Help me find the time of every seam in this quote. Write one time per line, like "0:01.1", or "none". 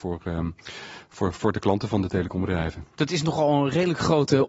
none